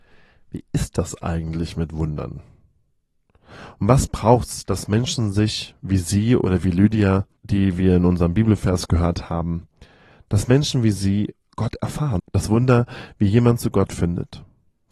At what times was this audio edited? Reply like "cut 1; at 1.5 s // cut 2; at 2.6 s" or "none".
cut 1; at 7.4 s // cut 2; at 12.2 s